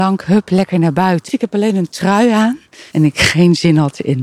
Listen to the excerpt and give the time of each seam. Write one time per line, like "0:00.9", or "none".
0:01.3
0:02.9